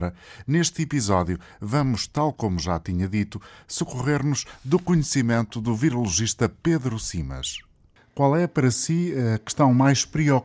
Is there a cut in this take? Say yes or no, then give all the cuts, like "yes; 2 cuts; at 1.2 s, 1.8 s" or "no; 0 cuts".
no; 0 cuts